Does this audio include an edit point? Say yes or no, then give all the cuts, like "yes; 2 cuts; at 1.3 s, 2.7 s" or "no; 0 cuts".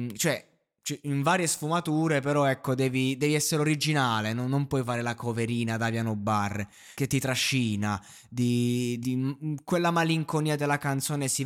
yes; 2 cuts; at 6.9 s, 9.0 s